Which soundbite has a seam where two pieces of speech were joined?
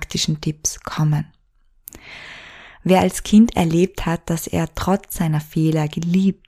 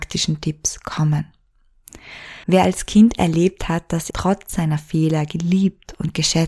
second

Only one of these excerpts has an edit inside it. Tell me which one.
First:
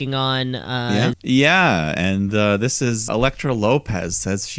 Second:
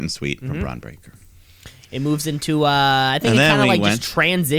first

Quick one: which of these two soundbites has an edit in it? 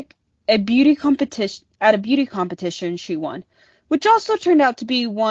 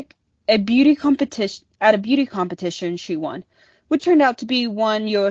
second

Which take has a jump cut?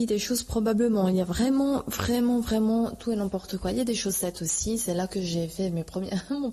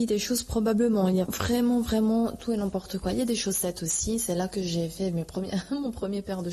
second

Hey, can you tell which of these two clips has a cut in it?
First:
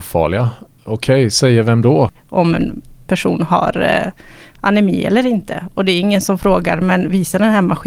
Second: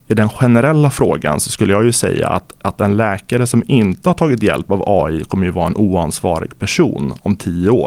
first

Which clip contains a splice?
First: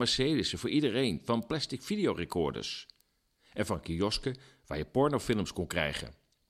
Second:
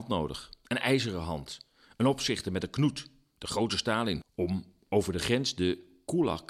second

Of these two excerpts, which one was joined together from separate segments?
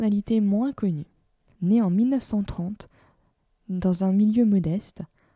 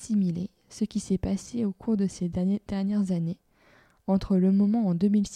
first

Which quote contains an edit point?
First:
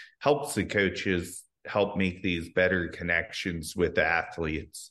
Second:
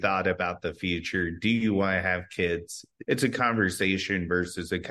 second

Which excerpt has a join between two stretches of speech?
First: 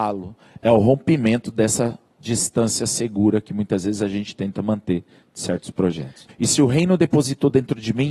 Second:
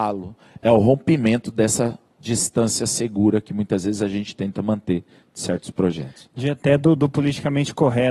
first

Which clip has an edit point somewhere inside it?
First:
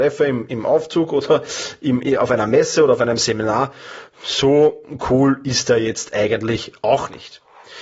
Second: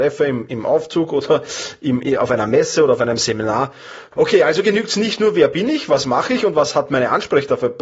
second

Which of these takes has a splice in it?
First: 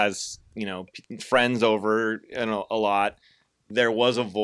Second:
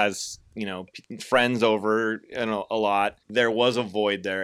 second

